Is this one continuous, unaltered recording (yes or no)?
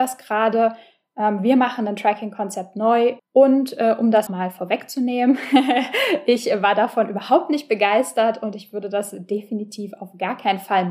no